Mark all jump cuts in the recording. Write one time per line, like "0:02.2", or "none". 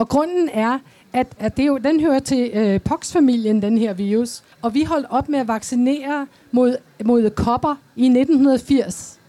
0:01.4
0:04.5